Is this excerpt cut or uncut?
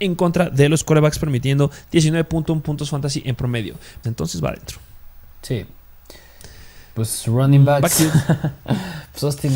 cut